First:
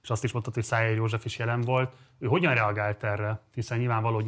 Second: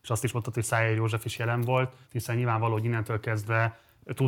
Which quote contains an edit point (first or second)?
second